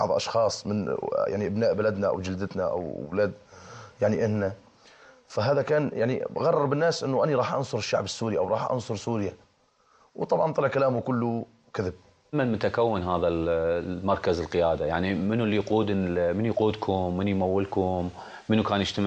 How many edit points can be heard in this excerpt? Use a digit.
1